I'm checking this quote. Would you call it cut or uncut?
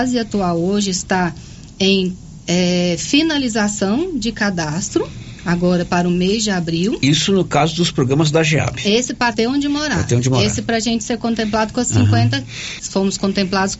cut